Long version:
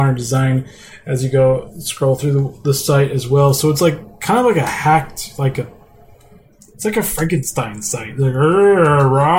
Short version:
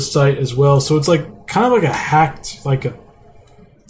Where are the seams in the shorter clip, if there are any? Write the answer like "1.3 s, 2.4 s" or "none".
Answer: none